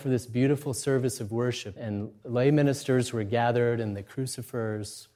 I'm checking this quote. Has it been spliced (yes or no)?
yes